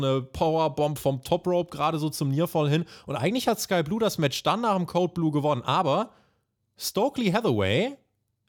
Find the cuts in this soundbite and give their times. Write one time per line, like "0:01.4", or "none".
none